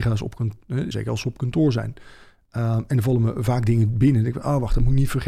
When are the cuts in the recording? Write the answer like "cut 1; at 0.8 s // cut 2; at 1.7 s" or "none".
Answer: cut 1; at 0.9 s

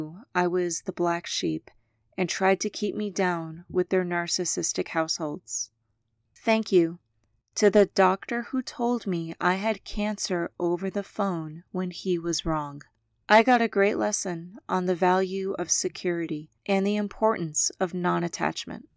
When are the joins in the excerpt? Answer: cut 1; at 6.3 s // cut 2; at 13.2 s // cut 3; at 16.6 s

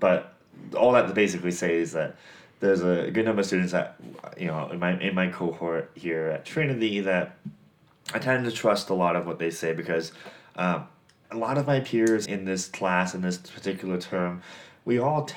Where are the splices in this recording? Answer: cut 1; at 11.2 s // cut 2; at 12.3 s

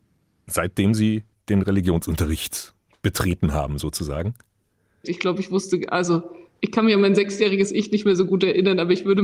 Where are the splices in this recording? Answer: cut 1; at 5.0 s // cut 2; at 6.6 s

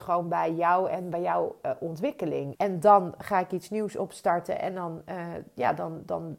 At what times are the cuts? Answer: cut 1; at 2.6 s

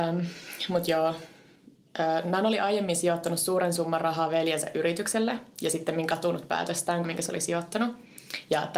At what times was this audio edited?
cut 1; at 7.0 s

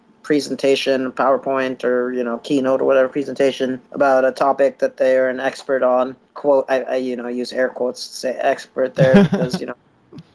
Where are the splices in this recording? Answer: cut 1; at 3.9 s // cut 2; at 6.3 s

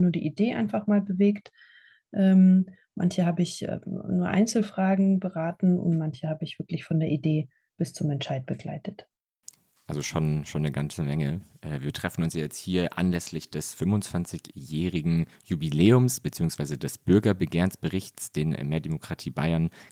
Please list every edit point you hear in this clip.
none

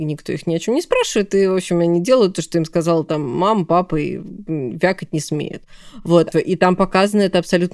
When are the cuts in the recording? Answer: cut 1; at 6.3 s

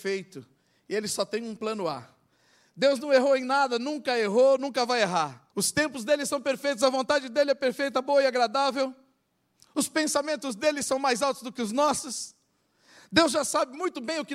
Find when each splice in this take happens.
cut 1; at 5.5 s

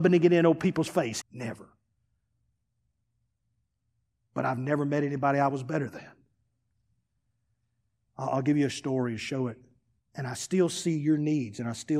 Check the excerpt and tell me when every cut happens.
cut 1; at 1.2 s // cut 2; at 8.1 s // cut 3; at 10.0 s

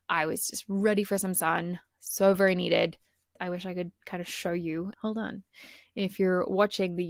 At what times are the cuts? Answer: cut 1; at 4.9 s

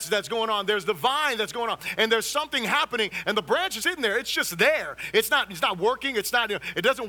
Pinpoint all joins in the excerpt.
cut 1; at 3.8 s

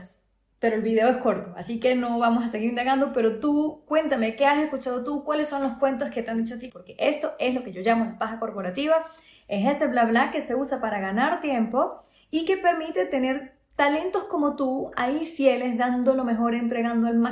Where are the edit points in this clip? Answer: cut 1; at 6.7 s

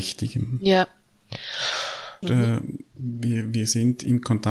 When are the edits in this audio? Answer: cut 1; at 2.2 s

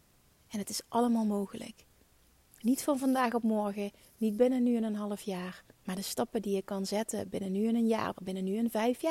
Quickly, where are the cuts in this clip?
cut 1; at 5.7 s // cut 2; at 8.1 s

